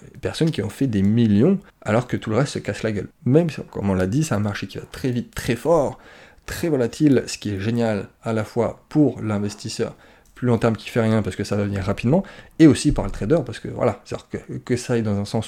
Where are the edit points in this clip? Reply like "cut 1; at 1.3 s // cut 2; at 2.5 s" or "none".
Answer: cut 1; at 1.7 s // cut 2; at 3.1 s